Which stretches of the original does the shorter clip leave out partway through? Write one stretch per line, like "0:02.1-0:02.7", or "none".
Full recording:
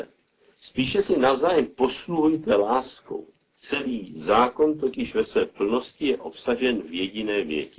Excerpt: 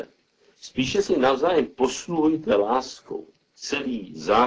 none